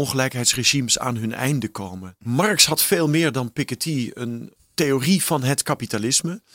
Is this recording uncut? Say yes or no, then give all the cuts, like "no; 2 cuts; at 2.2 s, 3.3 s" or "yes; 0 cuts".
no; 2 cuts; at 2.2 s, 4.6 s